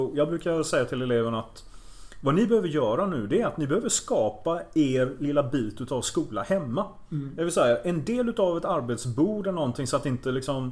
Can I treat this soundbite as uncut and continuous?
yes; 0 cuts

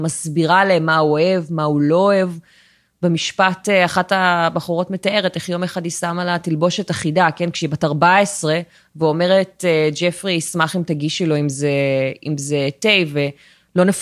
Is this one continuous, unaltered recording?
yes; 0 cuts

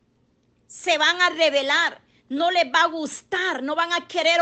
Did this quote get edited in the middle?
no; 0 cuts

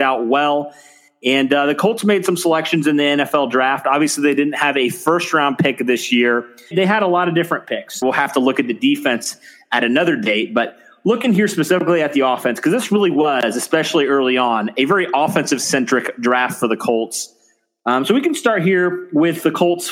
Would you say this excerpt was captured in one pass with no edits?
no; 2 cuts; at 6.7 s, 8.0 s

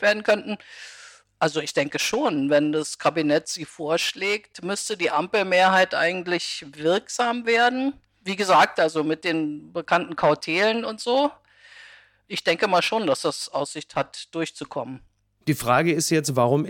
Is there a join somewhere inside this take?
no; 0 cuts

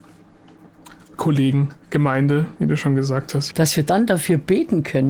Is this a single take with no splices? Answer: no; 2 cuts; at 1.8 s, 3.5 s

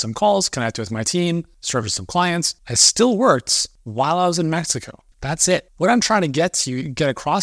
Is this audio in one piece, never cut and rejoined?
no; 1 cut; at 5.1 s

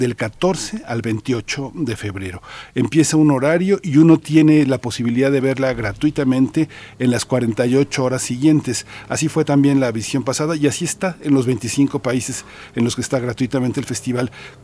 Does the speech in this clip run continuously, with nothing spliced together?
yes; 0 cuts

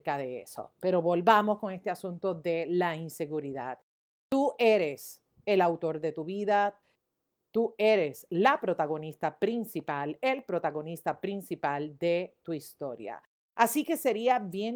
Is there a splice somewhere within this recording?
no; 0 cuts

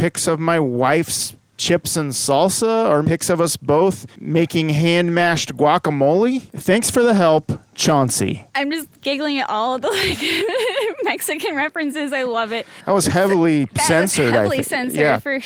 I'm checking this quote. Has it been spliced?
yes; 1 cut; at 3.0 s

